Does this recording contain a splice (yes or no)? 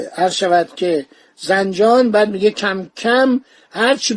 no